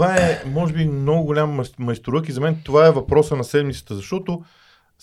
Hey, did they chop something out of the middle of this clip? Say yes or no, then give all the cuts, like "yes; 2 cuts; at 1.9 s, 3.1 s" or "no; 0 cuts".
no; 0 cuts